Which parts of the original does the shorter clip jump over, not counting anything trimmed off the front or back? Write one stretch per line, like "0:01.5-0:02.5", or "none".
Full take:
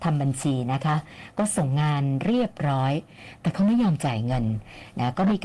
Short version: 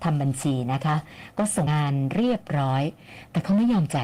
0:01.7-0:01.8